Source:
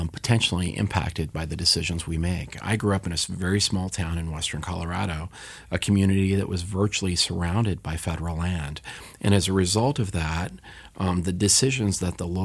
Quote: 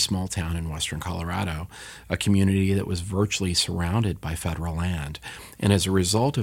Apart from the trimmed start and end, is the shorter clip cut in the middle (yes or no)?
no